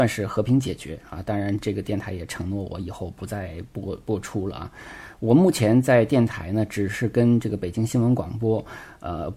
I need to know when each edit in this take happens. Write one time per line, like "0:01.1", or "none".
none